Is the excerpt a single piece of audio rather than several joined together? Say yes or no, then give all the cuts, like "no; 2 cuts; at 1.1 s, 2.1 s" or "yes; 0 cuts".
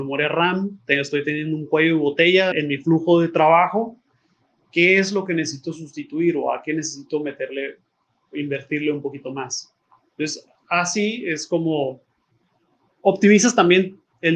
no; 1 cut; at 2.5 s